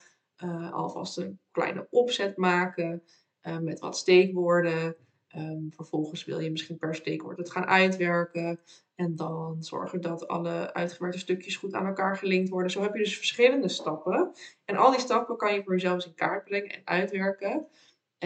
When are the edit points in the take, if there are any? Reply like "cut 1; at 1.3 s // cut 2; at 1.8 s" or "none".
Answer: none